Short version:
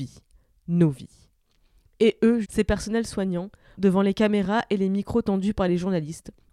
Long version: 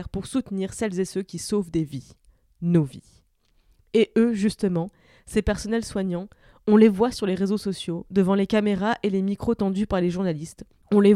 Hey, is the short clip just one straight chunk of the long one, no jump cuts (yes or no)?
no